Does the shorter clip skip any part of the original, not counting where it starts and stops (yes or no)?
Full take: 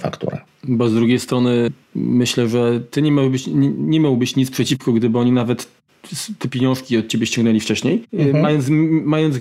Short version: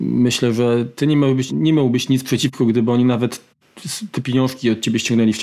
yes